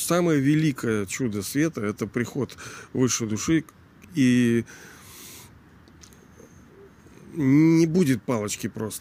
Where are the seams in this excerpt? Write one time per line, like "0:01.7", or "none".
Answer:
none